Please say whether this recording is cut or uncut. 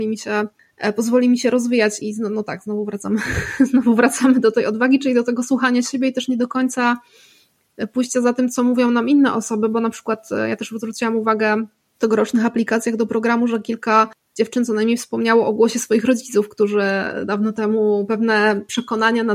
cut